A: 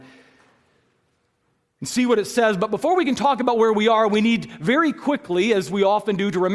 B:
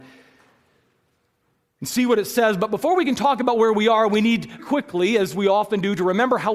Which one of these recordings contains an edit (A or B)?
B